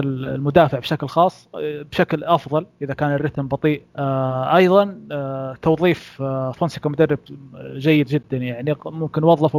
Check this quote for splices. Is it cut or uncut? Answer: cut